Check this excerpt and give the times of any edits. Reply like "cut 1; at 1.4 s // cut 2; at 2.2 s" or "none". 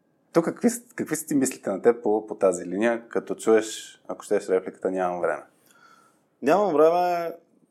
none